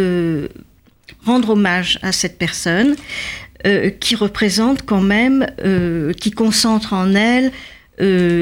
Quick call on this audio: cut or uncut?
uncut